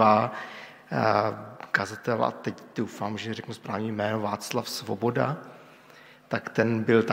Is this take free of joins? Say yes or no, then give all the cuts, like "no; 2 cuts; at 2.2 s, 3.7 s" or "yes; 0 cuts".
yes; 0 cuts